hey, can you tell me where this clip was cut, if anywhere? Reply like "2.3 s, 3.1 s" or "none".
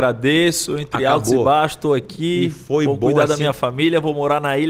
none